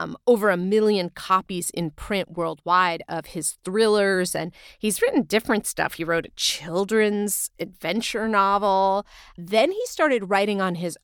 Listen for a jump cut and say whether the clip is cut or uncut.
cut